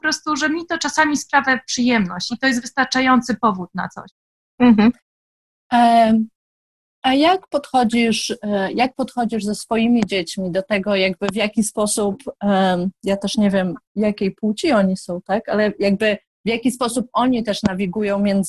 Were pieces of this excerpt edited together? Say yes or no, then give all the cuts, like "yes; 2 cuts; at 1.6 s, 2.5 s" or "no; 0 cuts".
no; 0 cuts